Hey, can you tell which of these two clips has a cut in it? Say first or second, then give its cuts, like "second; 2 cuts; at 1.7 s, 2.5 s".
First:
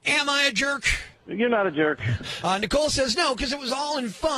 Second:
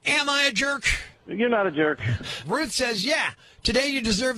second; 1 cut; at 2.4 s